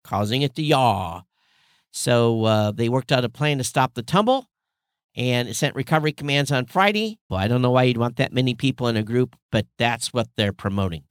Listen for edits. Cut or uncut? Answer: cut